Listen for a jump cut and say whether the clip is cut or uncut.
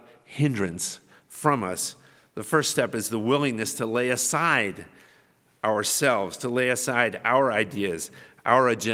uncut